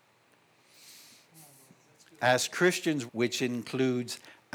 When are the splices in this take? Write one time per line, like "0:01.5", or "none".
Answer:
0:03.1

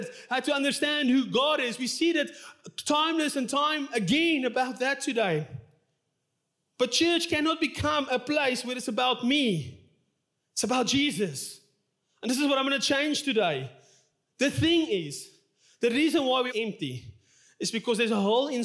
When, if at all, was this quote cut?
0:16.5

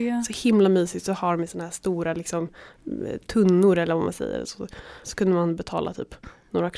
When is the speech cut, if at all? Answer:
0:05.0

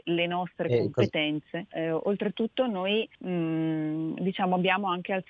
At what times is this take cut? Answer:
0:01.7
0:03.2

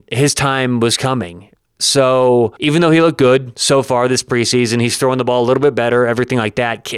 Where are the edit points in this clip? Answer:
0:02.6

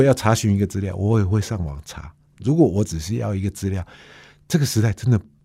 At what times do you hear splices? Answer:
none

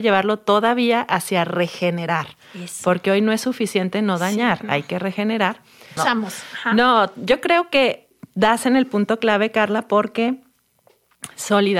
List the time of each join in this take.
0:06.0

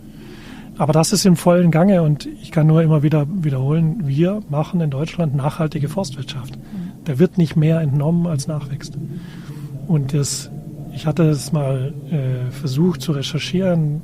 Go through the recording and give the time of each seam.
none

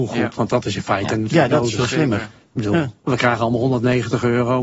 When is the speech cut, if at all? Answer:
none

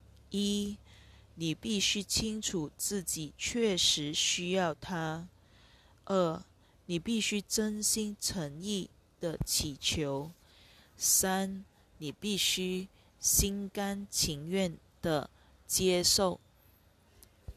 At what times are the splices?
none

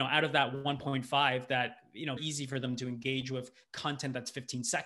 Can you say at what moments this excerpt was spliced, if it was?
0:02.2

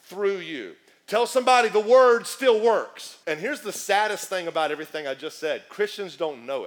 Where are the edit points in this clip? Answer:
0:03.2

